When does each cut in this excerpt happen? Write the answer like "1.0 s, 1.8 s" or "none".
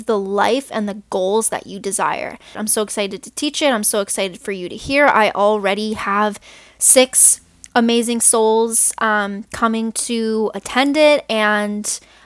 2.5 s